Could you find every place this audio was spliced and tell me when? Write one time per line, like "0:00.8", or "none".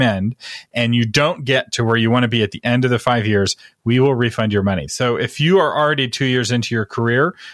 0:04.9